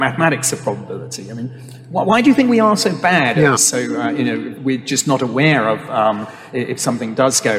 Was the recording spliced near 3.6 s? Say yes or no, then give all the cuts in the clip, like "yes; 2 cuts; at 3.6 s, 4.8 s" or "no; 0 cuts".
yes; 2 cuts; at 3.6 s, 4.6 s